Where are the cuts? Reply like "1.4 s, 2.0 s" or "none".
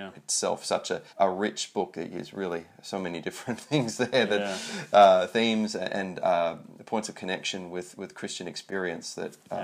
1.1 s

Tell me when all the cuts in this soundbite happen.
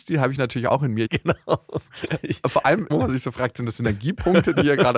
1.1 s, 2.9 s

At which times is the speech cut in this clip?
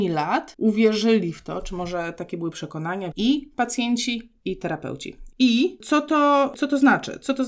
3.1 s, 5.3 s

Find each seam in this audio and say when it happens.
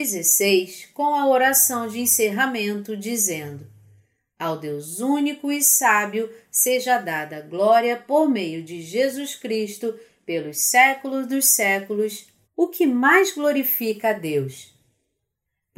12.4 s

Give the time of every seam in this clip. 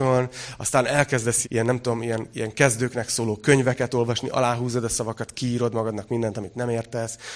1.4 s

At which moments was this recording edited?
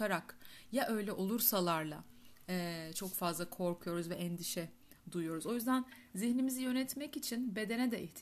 none

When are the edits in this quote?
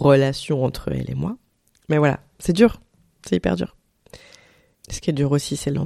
4.7 s

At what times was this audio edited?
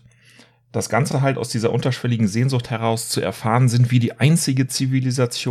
none

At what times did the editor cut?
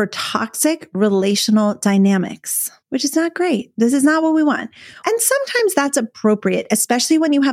2.8 s, 5.0 s

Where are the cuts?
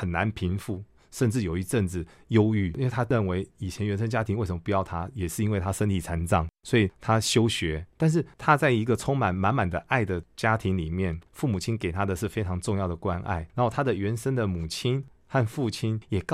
none

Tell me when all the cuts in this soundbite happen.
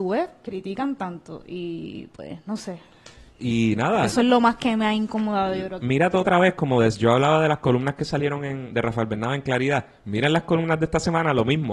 5.8 s

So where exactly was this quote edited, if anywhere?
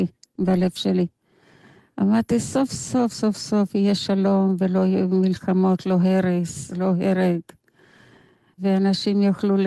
none

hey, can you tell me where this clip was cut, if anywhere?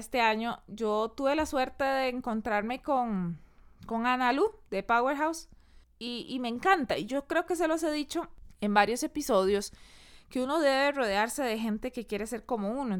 none

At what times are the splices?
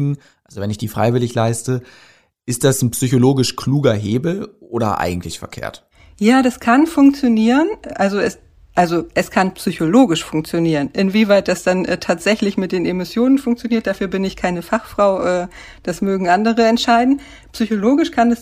none

